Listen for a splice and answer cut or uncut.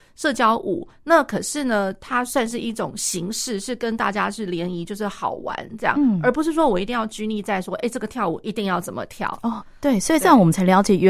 uncut